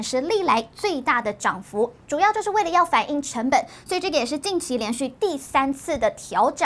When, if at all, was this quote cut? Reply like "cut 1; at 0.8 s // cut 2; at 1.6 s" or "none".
cut 1; at 2.0 s